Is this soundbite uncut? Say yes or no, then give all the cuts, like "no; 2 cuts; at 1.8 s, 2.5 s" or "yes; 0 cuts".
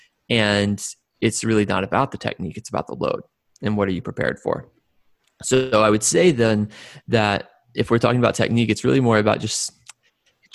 yes; 0 cuts